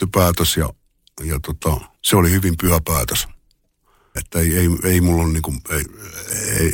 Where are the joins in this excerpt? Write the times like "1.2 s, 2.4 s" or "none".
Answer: 1.9 s, 4.2 s